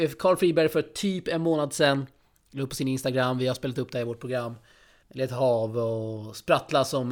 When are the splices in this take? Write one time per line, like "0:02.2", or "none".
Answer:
0:05.0